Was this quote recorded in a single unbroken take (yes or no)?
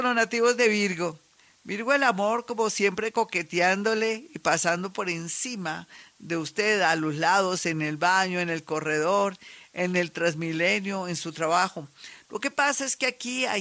yes